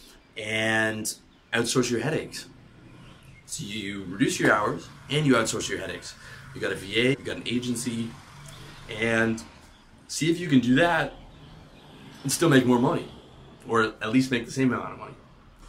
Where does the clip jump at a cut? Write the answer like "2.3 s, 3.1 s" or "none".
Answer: 7.1 s